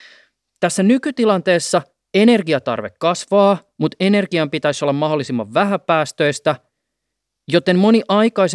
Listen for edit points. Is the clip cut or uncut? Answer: uncut